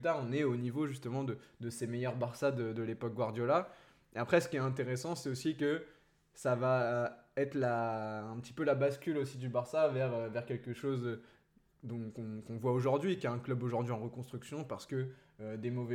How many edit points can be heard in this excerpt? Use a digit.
0